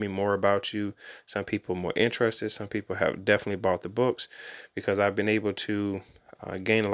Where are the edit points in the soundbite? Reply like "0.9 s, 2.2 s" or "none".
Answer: none